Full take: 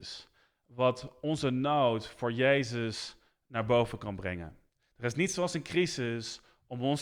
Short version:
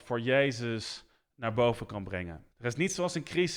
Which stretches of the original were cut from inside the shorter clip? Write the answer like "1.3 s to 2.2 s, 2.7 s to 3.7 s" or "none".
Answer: 4.6 s to 4.9 s

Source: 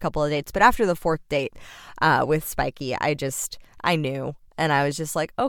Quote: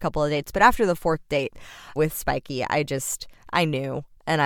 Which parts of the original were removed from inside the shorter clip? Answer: 2.0 s to 2.3 s

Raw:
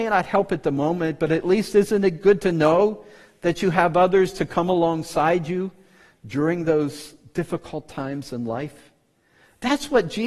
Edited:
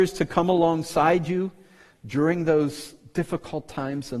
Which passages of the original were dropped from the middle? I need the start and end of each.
none

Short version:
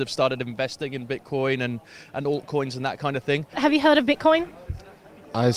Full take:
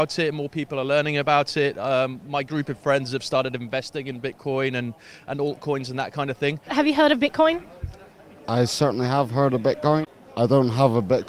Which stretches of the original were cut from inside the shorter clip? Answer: none

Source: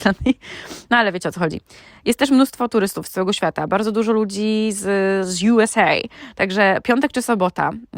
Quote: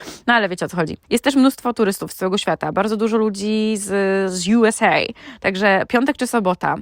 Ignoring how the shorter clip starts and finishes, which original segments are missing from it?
1.7 s to 2.0 s

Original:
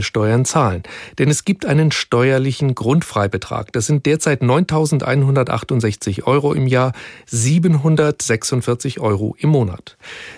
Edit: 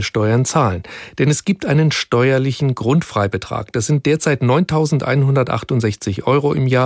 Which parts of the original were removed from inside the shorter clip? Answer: none

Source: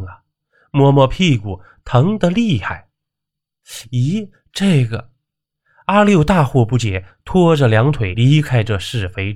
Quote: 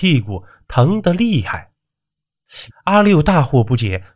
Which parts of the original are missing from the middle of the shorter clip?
3.9 s to 5.7 s

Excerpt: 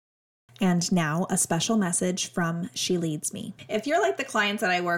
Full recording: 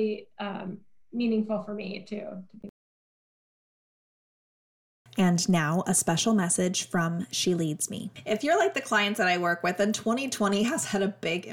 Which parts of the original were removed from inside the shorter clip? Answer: none

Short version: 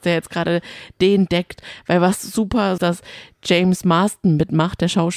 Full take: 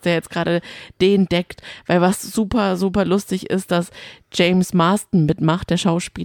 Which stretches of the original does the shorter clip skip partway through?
2.8 s to 3.7 s

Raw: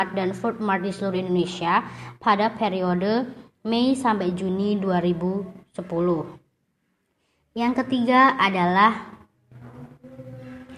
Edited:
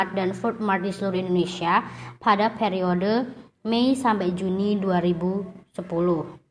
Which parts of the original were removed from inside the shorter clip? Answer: none

